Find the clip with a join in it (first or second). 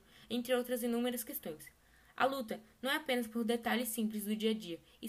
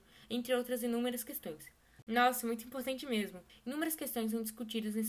second